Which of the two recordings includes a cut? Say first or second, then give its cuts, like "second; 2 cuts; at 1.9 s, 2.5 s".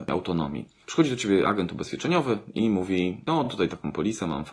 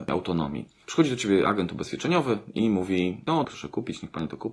second; 1 cut; at 3.4 s